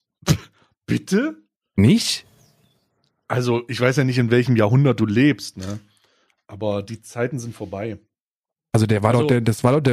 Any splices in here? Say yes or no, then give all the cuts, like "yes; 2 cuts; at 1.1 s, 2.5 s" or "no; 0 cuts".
no; 0 cuts